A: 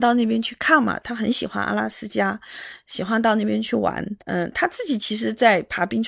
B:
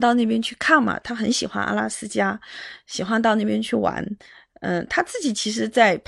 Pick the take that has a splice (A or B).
A